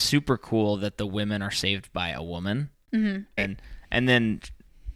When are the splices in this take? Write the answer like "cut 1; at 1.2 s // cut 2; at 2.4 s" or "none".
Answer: cut 1; at 3.4 s